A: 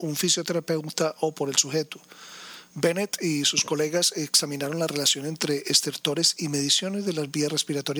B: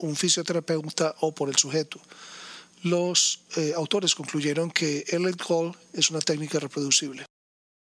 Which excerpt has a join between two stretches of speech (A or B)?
A